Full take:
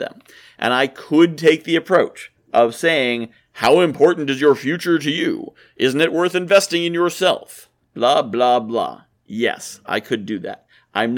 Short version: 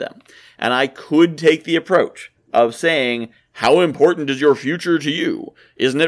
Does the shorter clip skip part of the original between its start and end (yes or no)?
no